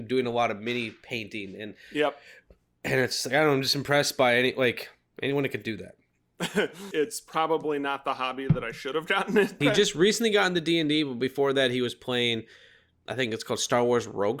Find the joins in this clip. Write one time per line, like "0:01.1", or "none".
0:06.9
0:09.6